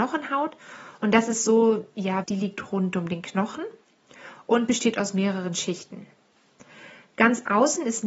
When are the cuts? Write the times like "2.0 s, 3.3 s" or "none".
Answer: 2.2 s